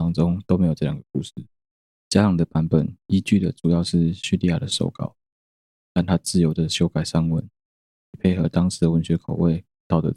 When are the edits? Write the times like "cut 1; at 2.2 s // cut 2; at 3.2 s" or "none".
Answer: cut 1; at 1.9 s